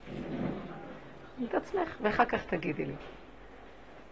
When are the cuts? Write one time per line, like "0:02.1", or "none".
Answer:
0:01.5